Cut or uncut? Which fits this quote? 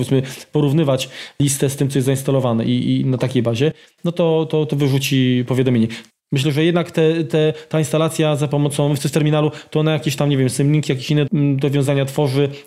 cut